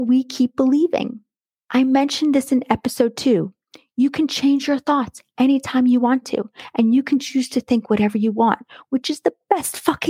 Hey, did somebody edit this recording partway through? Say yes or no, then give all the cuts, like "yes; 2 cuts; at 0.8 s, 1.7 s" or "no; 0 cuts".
no; 0 cuts